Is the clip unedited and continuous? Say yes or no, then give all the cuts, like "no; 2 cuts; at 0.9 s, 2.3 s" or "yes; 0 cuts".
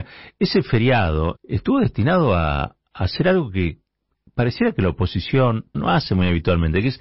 no; 2 cuts; at 1.3 s, 5.7 s